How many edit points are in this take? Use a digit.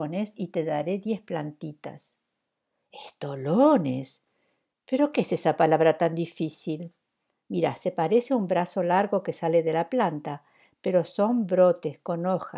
1